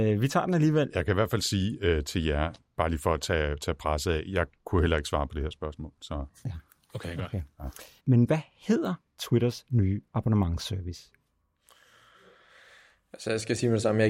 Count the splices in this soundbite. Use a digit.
1